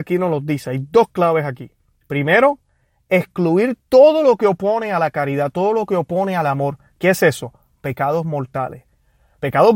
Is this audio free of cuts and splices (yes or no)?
yes